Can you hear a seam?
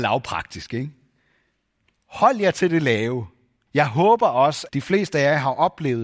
yes; 2 cuts; at 3.7 s, 4.7 s

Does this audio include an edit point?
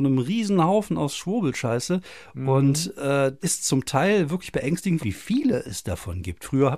yes; 2 cuts; at 3.4 s, 5.0 s

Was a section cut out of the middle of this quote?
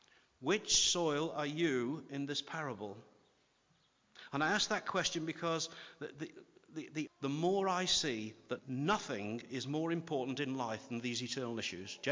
yes; 2 cuts; at 7.1 s, 8.6 s

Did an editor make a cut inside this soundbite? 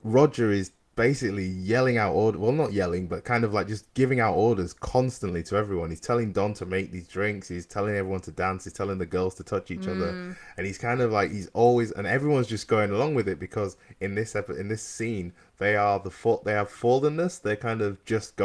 no; 0 cuts

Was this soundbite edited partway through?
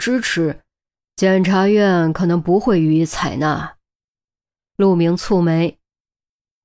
no; 0 cuts

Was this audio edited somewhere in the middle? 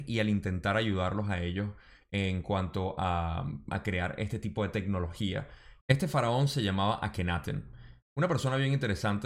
yes; 1 cut; at 5.8 s

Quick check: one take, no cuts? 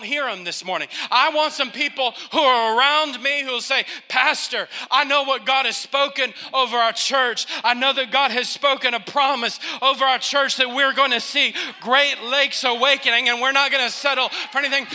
yes; 0 cuts

